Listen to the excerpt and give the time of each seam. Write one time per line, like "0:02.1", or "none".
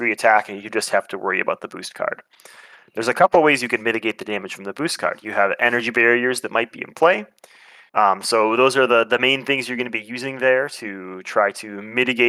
0:07.9